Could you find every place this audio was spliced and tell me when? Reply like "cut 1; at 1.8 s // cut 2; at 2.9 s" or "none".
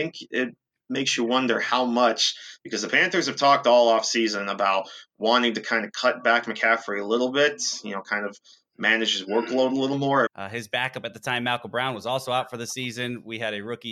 cut 1; at 10.3 s

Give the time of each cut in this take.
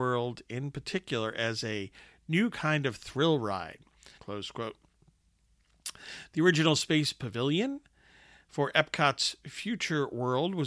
cut 1; at 4.2 s

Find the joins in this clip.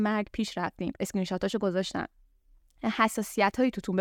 cut 1; at 1.0 s

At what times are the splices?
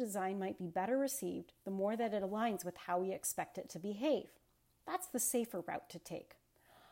none

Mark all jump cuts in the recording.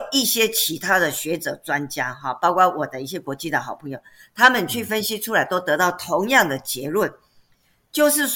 none

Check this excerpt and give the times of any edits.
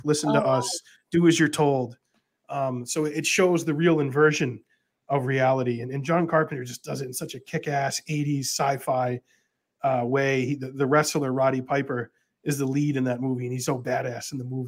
cut 1; at 13.7 s

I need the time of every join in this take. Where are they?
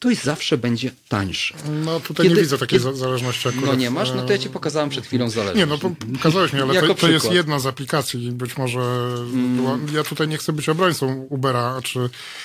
cut 1; at 10.3 s

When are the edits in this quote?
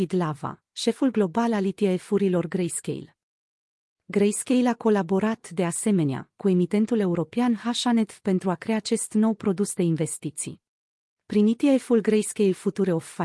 cut 1; at 11.1 s

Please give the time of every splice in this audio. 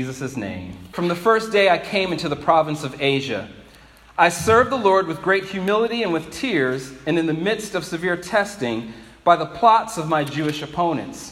cut 1; at 0.9 s

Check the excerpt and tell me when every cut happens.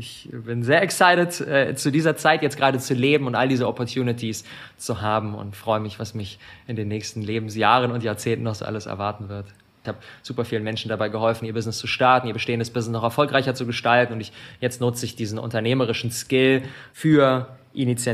cut 1; at 9.8 s

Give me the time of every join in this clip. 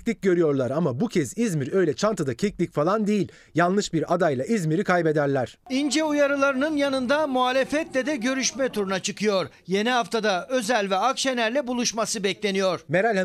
none

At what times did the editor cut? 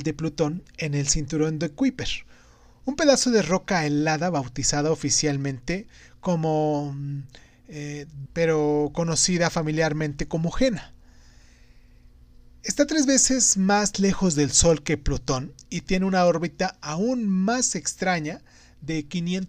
cut 1; at 8.3 s

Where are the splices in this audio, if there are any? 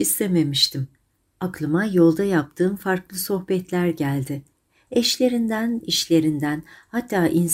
cut 1; at 5.8 s

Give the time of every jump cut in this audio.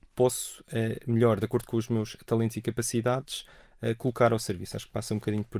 none

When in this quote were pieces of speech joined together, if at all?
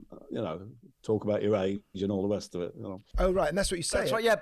cut 1; at 3.1 s

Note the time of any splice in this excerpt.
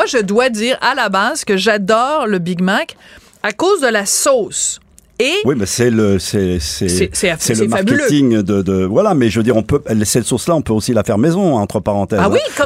none

